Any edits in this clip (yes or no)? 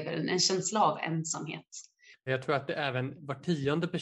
yes